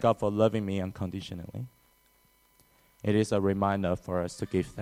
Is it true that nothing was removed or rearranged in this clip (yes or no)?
yes